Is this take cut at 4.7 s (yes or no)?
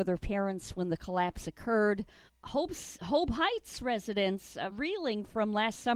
yes